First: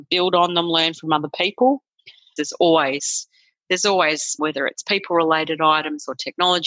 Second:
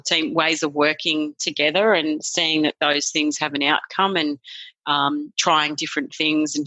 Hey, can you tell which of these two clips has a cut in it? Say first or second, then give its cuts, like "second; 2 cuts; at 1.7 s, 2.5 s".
first; 2 cuts; at 2.4 s, 4.4 s